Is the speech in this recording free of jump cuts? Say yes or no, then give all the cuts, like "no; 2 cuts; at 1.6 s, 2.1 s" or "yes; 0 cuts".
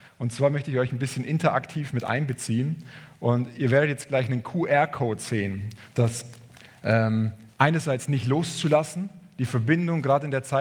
no; 2 cuts; at 5.9 s, 7.5 s